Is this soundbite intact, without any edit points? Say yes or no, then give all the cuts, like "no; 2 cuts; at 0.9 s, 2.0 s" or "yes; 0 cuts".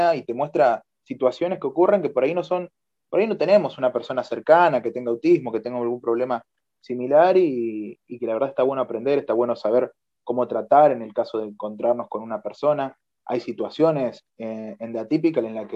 yes; 0 cuts